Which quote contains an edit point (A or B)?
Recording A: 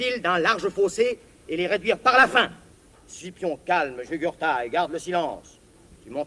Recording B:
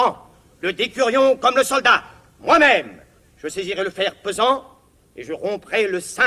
A